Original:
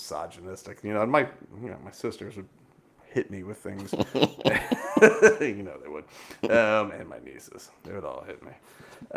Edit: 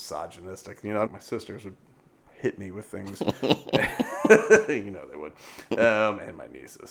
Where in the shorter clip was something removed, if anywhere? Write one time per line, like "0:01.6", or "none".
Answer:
0:01.1